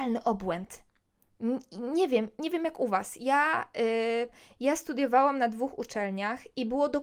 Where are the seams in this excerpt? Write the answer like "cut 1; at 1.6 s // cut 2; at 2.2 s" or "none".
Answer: none